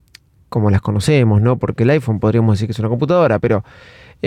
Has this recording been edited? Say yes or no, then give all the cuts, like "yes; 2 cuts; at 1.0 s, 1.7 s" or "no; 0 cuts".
no; 0 cuts